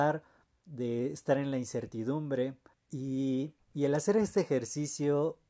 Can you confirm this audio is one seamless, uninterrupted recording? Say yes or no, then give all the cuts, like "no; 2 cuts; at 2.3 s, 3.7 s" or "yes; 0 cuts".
no; 1 cut; at 2.7 s